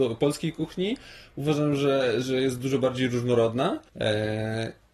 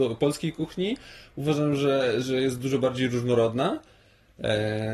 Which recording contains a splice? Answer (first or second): first